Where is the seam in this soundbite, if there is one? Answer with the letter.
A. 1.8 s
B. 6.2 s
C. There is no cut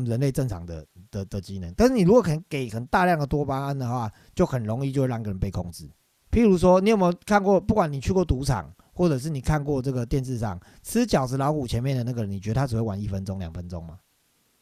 B